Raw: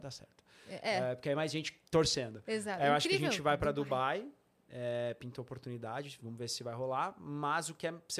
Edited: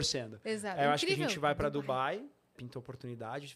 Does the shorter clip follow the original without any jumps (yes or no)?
no